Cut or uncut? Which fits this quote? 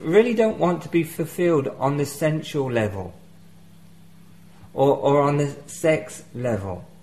uncut